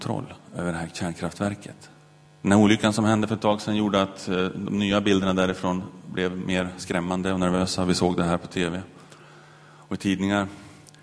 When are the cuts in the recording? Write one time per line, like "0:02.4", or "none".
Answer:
0:02.3